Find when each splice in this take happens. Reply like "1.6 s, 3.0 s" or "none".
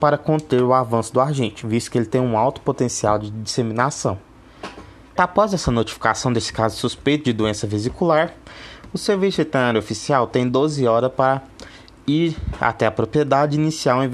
5.2 s